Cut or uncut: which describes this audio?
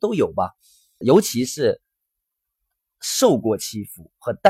cut